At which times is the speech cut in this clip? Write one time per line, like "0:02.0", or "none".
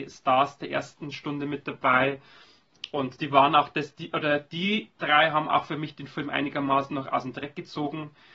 none